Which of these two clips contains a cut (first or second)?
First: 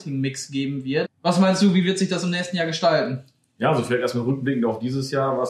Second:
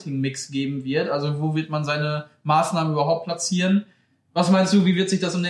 first